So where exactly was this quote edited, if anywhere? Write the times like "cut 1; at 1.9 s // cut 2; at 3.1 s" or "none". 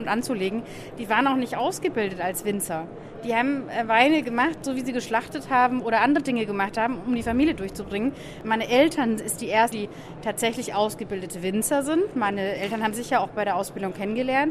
cut 1; at 9.7 s